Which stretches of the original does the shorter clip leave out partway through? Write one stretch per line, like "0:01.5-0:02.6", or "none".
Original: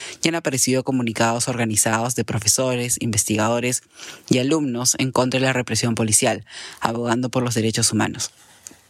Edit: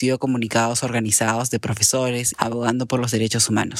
0:03.0-0:06.8